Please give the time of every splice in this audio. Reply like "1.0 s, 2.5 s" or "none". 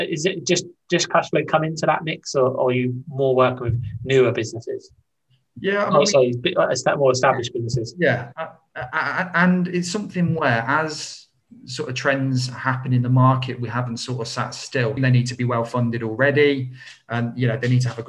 15.0 s